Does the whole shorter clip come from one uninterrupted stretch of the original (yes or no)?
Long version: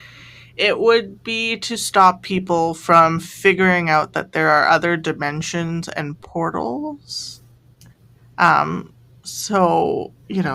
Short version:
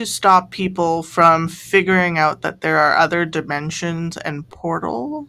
yes